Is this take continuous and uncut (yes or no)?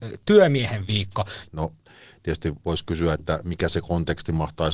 no